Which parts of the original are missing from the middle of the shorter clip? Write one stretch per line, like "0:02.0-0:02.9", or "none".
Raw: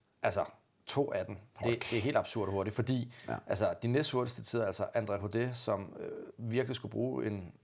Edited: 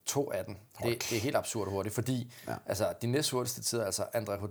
none